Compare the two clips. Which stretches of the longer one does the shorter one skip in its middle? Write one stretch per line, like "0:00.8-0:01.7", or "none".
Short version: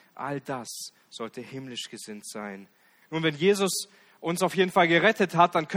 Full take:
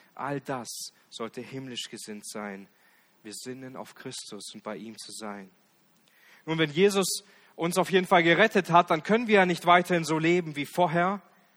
0:03.0-0:06.4